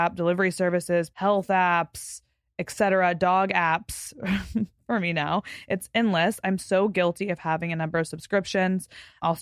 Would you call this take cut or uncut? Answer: cut